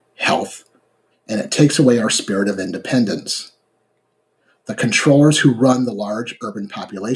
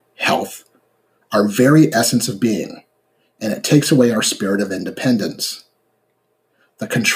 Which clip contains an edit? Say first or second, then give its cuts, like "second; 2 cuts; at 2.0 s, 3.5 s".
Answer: first; 1 cut; at 1.1 s